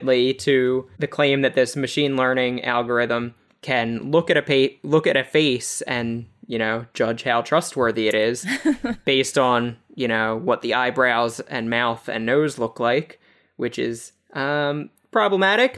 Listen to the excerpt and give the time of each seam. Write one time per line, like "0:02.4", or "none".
none